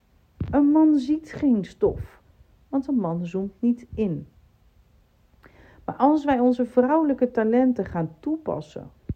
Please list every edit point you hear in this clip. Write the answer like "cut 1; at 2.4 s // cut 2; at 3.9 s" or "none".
none